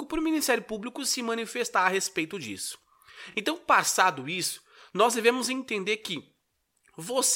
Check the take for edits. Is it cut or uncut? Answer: uncut